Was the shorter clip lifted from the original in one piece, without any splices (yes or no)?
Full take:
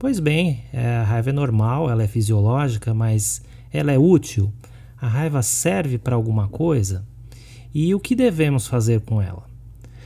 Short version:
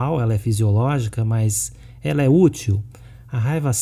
yes